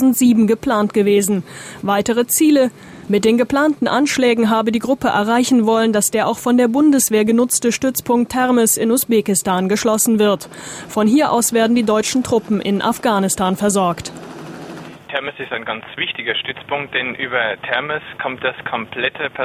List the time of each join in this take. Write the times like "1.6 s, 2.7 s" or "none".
3.1 s